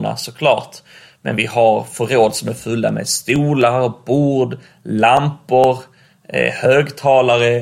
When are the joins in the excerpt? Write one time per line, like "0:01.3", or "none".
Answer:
none